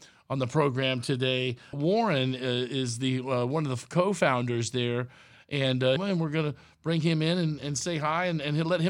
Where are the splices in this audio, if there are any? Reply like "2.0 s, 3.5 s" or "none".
6.0 s